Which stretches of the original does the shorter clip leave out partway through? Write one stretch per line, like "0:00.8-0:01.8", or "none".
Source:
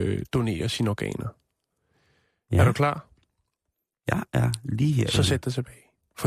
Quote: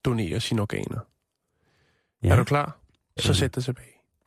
0:03.5-0:05.1